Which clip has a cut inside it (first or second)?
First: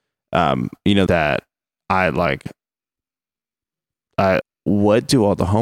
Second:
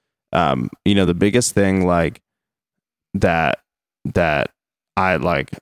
first